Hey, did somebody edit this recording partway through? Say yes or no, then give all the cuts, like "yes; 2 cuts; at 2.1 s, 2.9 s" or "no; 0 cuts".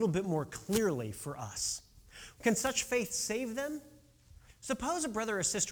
yes; 1 cut; at 2.4 s